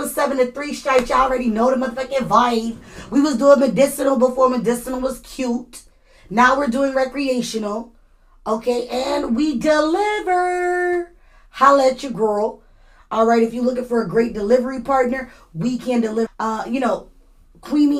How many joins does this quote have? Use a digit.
1